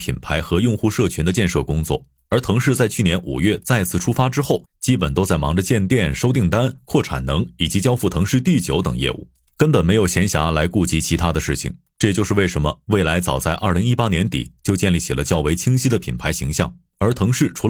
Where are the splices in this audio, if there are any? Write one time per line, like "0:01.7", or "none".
none